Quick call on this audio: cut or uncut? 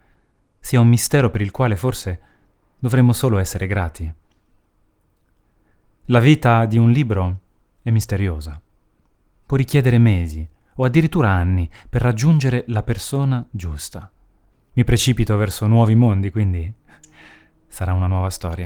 cut